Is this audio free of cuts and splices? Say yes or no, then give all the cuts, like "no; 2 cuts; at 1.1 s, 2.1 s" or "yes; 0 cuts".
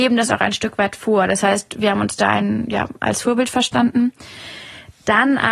yes; 0 cuts